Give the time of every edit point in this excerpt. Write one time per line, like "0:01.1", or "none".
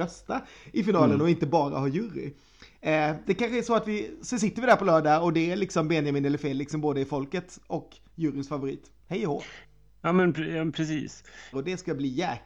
0:03.2
0:09.0
0:11.5